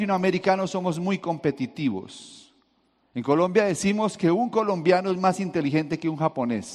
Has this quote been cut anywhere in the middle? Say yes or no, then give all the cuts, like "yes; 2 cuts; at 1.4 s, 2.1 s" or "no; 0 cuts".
yes; 1 cut; at 3.0 s